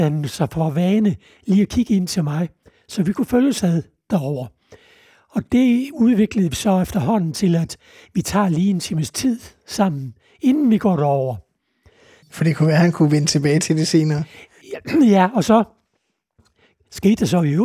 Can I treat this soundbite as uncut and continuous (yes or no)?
no